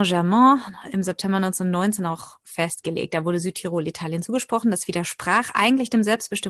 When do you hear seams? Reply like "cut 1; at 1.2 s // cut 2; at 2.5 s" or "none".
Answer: none